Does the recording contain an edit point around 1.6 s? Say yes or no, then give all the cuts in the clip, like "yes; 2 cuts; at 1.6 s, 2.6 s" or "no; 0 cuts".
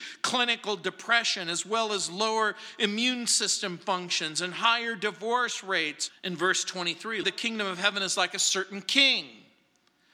no; 2 cuts; at 6.1 s, 7.2 s